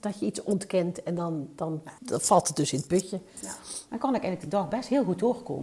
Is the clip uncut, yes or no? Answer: no